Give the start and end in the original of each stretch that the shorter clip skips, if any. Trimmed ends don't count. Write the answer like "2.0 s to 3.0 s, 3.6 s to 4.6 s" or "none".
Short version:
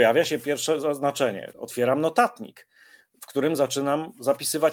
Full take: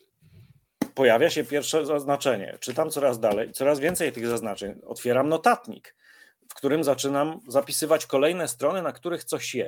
2.6 s to 4.8 s

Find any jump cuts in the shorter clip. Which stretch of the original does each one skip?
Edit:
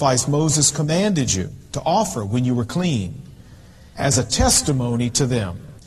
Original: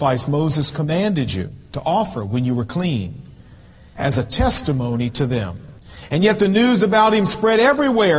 none

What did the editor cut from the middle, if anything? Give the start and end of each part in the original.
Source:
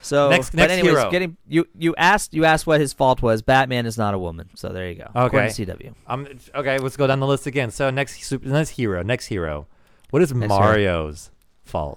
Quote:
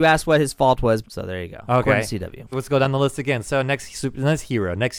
3.4 s to 4.5 s, 6.0 s to 6.8 s

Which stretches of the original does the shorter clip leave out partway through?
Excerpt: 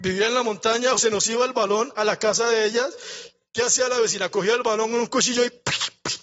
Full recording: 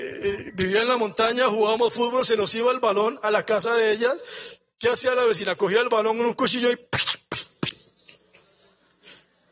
1.5 s to 2.2 s

